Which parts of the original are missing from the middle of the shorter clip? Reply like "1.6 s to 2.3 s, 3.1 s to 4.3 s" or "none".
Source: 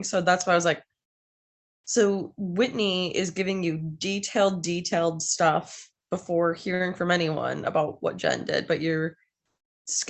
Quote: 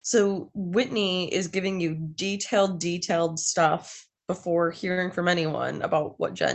none

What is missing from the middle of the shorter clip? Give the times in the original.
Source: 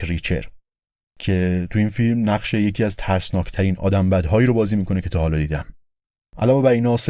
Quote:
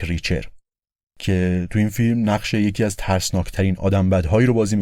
none

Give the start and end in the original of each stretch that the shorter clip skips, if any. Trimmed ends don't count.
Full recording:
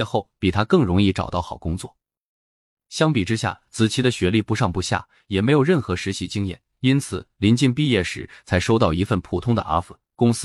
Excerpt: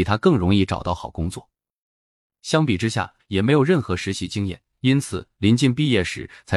3.7 s to 5.2 s

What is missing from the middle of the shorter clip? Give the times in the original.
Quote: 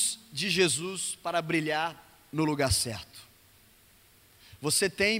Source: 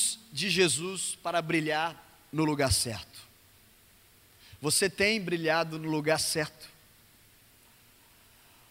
none

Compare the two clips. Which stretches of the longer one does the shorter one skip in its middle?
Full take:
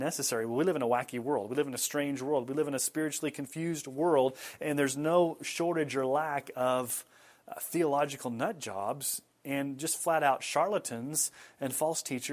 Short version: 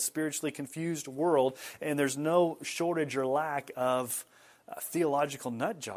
none

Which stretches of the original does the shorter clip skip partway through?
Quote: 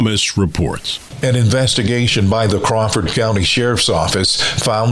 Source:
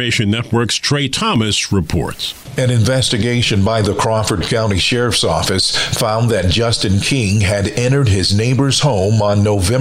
none

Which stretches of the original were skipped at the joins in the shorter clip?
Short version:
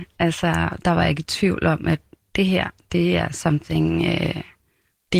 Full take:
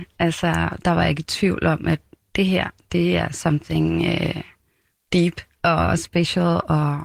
none

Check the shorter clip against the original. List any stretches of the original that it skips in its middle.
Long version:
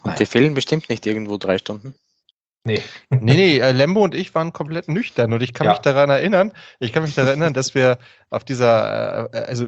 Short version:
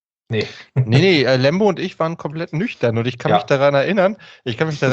none

